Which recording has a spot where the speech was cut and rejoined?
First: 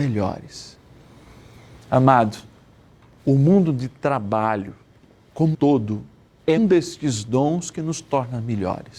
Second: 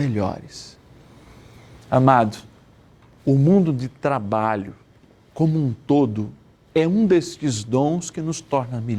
first; 2 cuts; at 5.5 s, 6.6 s

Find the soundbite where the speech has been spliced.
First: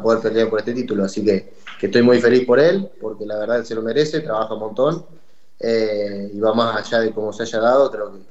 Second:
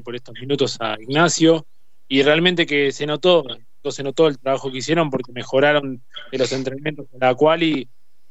second; 1 cut; at 3.8 s

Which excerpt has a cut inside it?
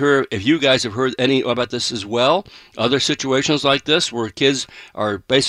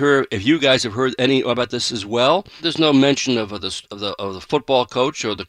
second; 1 cut; at 2.6 s

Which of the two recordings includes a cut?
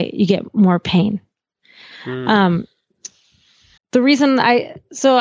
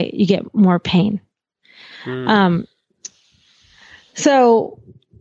first; 1 cut; at 3.8 s

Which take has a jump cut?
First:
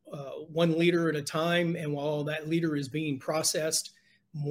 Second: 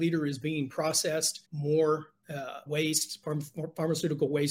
second; 2 cuts; at 1.4 s, 2.7 s

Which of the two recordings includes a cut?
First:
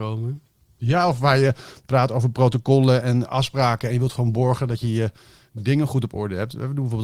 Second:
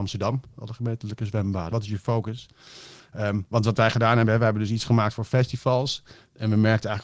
second; 1 cut; at 1.7 s

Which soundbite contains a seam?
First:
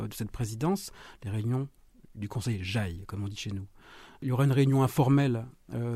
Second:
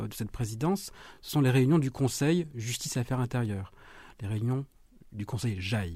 first; 1 cut; at 1.1 s

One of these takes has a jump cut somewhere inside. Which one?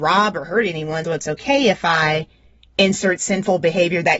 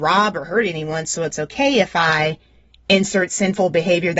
first; 1 cut; at 1.0 s

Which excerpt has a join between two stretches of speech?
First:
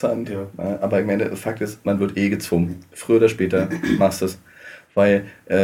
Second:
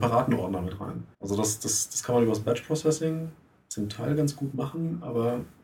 second; 1 cut; at 1.1 s

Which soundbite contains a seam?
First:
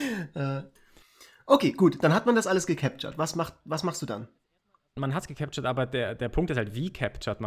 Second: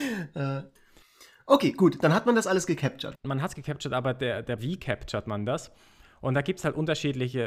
second; 2 cuts; at 3.1 s, 4.6 s

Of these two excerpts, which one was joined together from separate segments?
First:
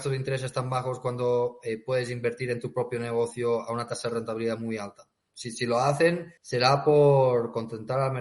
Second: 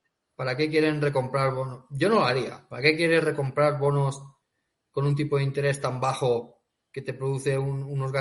first; 2 cuts; at 5.3 s, 6.4 s

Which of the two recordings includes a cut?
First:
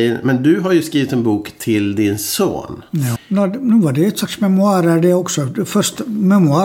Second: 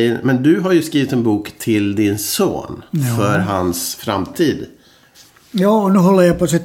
first; 1 cut; at 3.2 s

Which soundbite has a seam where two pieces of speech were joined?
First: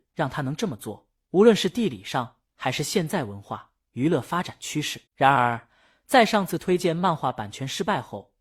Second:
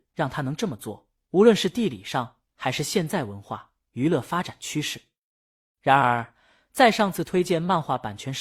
first; 1 cut; at 5.1 s

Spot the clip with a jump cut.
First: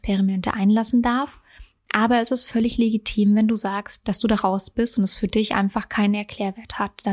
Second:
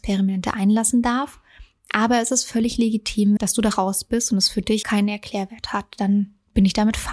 second; 2 cuts; at 3.4 s, 4.8 s

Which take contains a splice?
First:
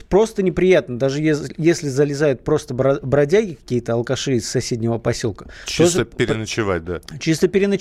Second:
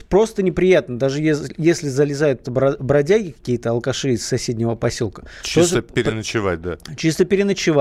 second; 1 cut; at 2.4 s

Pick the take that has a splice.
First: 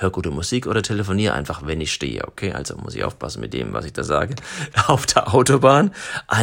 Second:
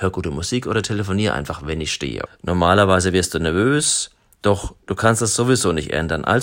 second; 1 cut; at 2.3 s

